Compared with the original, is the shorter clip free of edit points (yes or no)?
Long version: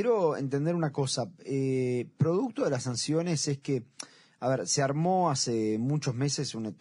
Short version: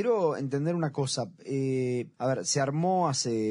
no